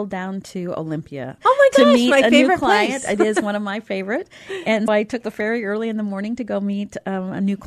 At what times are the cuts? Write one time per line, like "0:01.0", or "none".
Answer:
0:01.4
0:04.9